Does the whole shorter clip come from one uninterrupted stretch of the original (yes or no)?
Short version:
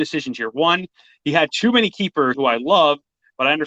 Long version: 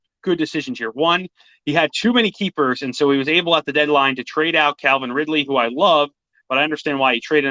no